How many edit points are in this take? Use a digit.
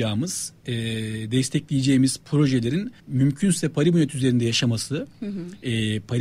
1